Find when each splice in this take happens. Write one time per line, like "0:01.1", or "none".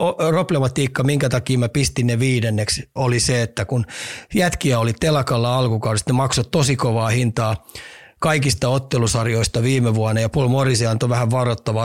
0:03.0